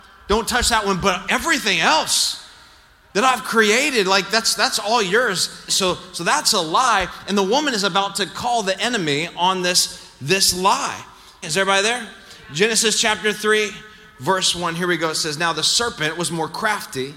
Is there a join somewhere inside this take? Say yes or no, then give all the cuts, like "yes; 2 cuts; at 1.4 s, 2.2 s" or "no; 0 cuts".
yes; 2 cuts; at 5.7 s, 11.4 s